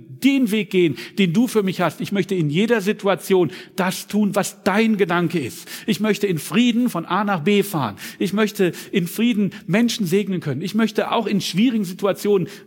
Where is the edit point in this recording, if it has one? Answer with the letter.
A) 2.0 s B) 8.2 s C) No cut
C